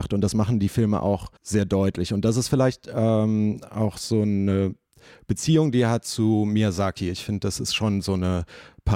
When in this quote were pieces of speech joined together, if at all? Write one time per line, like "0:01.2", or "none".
0:01.4